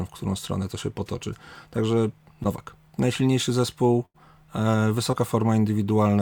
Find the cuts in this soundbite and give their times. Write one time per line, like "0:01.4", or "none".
0:02.9

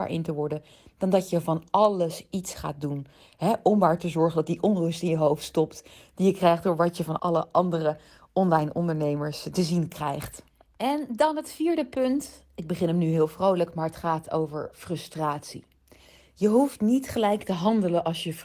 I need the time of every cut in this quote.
0:07.2

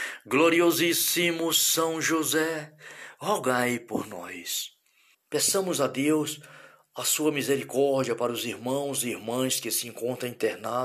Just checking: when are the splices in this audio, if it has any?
0:05.1

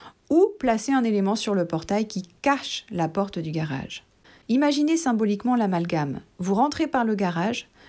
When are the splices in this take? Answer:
0:04.4

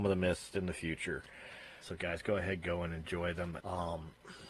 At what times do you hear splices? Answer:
0:01.8
0:03.6

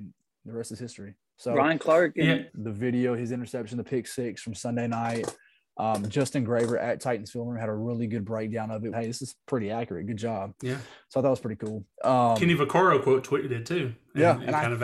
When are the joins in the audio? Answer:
0:02.5
0:08.9

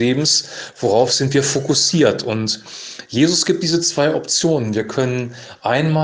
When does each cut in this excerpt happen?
none

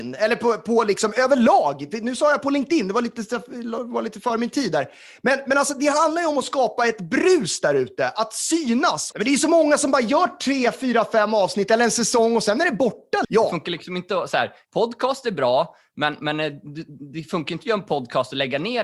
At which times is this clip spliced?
0:09.1
0:13.2
0:14.6

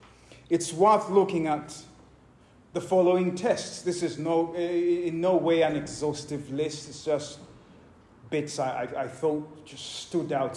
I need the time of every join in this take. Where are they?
none

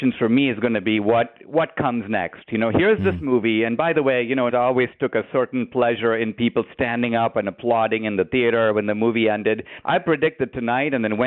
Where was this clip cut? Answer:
0:04.5
0:09.8

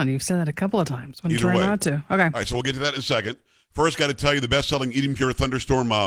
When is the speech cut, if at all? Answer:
none

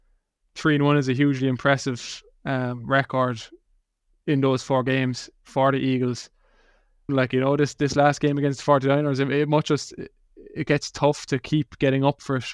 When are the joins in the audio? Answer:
0:07.1

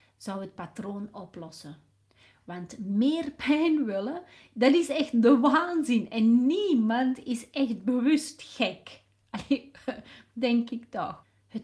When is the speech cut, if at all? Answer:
none

